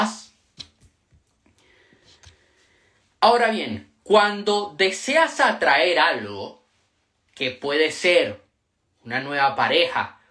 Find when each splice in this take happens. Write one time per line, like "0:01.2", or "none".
none